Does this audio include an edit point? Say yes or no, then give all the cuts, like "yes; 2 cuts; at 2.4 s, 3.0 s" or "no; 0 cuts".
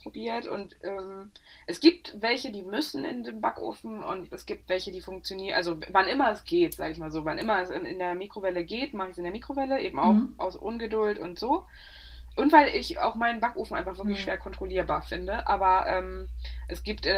no; 0 cuts